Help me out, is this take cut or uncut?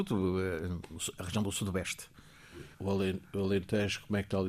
cut